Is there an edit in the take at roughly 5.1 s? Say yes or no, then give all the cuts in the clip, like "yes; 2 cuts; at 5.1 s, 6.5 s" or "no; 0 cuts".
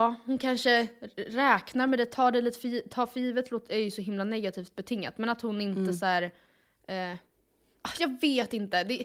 no; 0 cuts